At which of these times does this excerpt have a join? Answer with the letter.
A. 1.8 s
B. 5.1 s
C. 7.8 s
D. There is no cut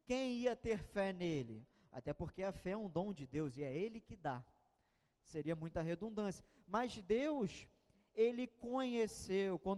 D